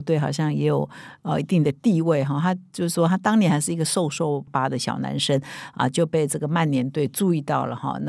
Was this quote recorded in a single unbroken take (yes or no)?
no